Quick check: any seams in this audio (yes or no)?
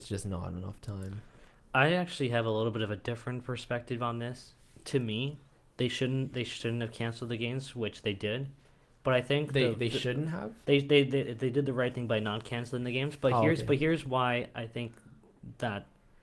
no